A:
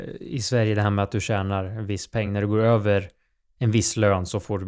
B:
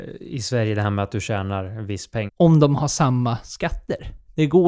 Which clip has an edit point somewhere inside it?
B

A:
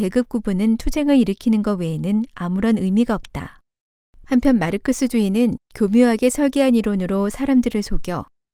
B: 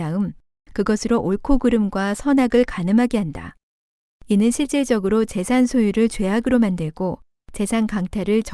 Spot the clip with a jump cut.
B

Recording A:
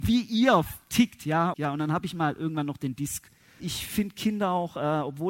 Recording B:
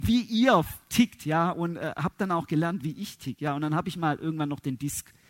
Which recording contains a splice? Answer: A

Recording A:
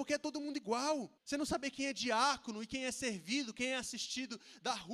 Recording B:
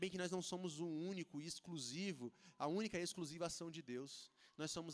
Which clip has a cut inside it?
A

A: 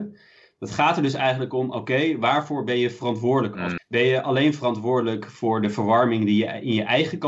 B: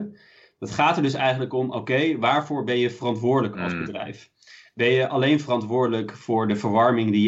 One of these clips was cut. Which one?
A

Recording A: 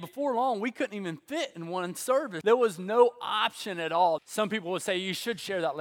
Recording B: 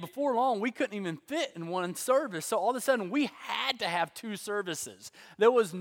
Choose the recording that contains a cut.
A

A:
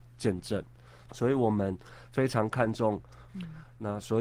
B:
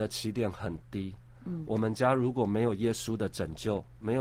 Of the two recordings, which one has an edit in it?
A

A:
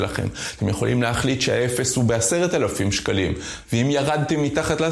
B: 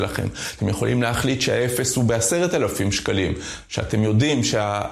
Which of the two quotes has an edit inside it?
A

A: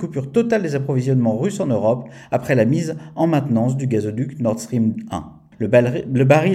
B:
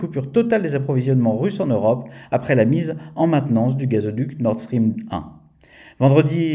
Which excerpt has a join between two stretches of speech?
A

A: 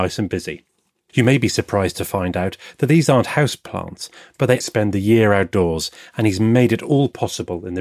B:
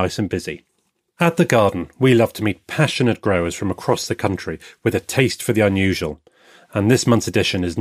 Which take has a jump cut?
A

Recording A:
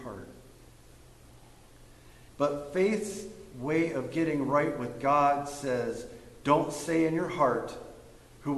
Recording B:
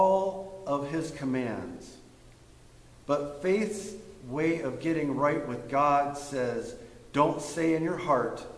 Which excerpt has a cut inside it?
A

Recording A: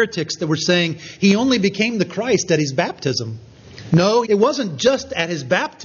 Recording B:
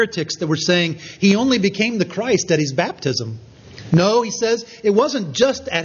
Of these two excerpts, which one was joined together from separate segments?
A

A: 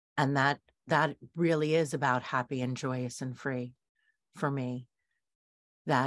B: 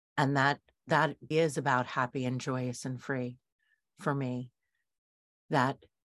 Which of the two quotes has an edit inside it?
B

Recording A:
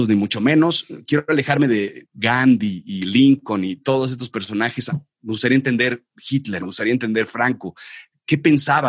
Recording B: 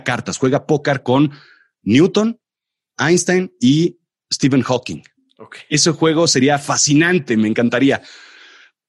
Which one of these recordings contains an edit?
A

